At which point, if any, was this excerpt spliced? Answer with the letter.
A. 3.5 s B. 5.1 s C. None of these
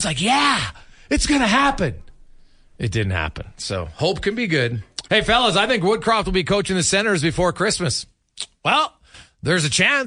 B